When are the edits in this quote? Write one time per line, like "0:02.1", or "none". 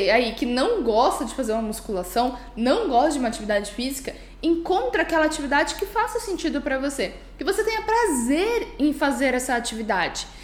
none